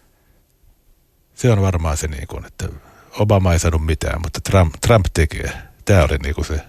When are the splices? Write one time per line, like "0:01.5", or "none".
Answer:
none